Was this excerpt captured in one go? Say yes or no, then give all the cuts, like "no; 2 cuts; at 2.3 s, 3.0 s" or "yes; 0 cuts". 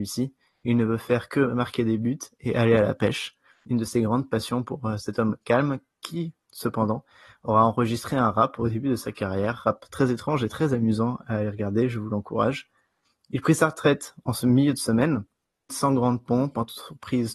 no; 1 cut; at 15.7 s